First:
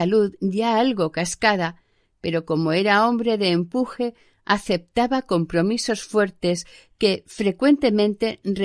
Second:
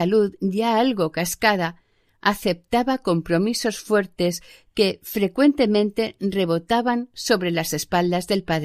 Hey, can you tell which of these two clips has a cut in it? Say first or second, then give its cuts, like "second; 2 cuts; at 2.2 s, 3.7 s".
second; 1 cut; at 2.1 s